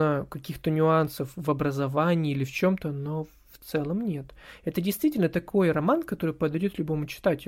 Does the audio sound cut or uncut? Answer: uncut